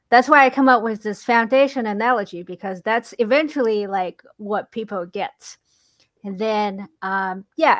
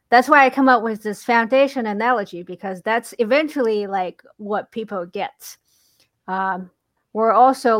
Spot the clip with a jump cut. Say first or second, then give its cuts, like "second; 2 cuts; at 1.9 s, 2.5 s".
second; 1 cut; at 6.1 s